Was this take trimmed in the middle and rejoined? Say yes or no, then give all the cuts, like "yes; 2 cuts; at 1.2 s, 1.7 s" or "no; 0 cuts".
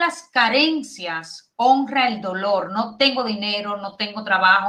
no; 0 cuts